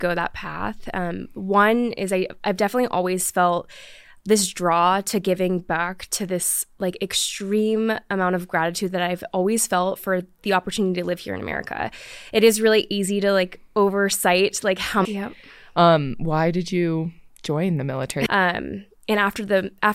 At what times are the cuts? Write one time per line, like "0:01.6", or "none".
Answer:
0:15.0
0:18.3